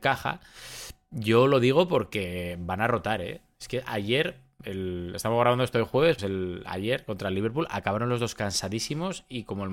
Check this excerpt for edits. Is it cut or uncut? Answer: cut